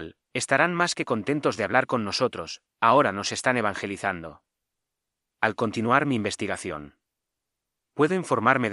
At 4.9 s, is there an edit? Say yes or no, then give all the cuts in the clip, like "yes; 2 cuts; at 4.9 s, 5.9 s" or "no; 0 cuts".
no; 1 cut; at 2.7 s